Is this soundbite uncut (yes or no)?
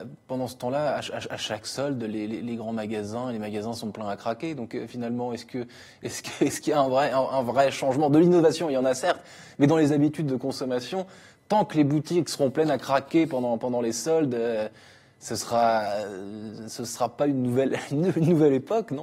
yes